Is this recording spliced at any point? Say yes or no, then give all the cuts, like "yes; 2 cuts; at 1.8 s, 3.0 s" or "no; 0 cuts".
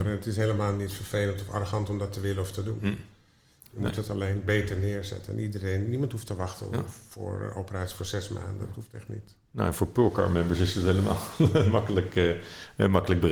no; 0 cuts